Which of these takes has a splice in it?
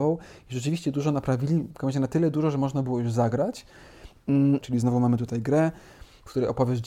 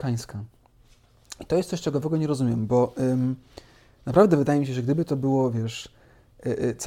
first; 1 cut; at 4.6 s

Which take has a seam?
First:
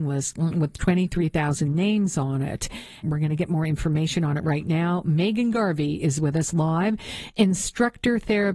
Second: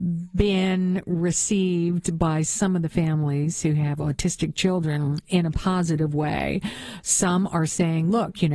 first; 1 cut; at 3.0 s

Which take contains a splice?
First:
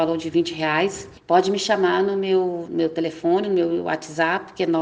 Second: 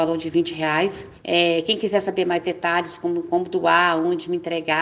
first; 2 cuts; at 1.2 s, 2.7 s

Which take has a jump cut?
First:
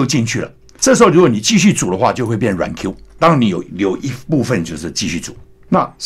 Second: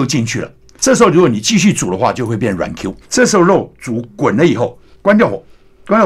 second; 2 cuts; at 3.0 s, 4.9 s

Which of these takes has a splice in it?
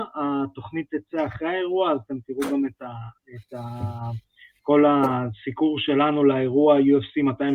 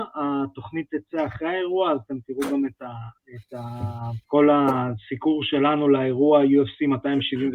second; 1 cut; at 4.2 s

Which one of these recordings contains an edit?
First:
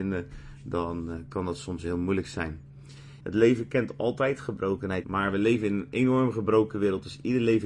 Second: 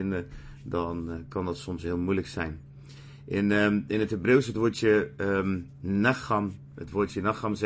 first; 2 cuts; at 3.2 s, 5.0 s

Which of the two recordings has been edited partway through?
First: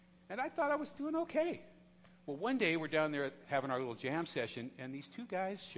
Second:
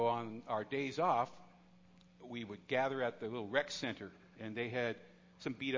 first; 1 cut; at 3.4 s

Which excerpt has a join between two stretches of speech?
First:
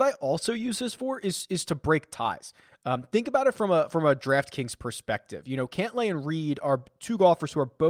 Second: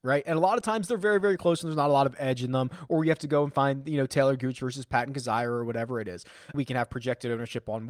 second; 1 cut; at 6.5 s

